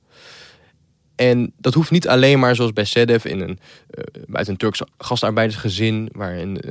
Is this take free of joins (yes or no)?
yes